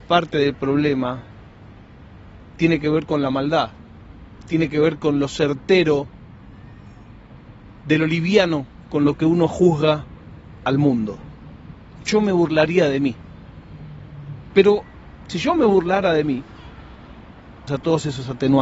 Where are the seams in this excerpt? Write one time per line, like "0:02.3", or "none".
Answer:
0:14.5
0:17.7